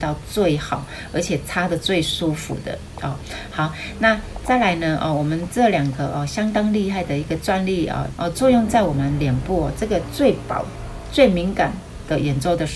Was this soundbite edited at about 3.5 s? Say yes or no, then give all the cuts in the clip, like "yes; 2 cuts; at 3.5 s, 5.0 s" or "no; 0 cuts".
no; 1 cut; at 8.1 s